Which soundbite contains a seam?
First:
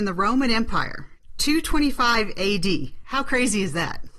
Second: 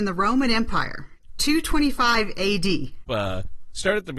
second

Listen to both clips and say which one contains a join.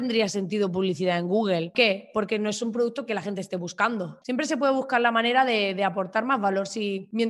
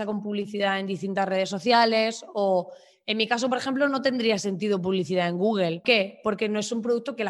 first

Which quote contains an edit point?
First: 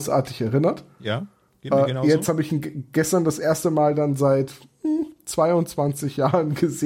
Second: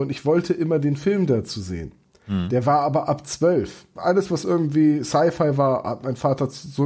second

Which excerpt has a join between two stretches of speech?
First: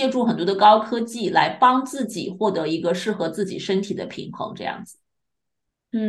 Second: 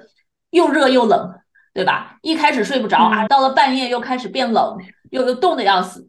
second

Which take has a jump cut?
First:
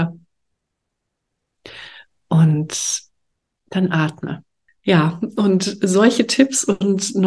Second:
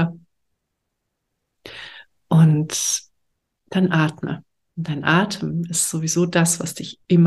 first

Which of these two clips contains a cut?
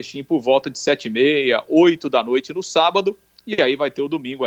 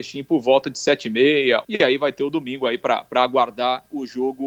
second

